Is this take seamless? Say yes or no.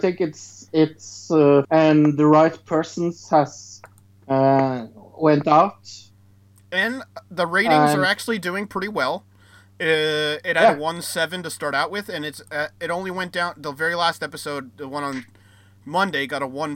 no